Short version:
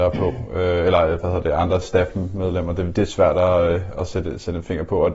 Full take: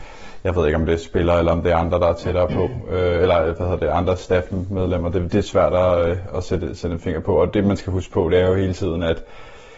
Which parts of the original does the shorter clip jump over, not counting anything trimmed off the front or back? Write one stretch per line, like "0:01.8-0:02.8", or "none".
none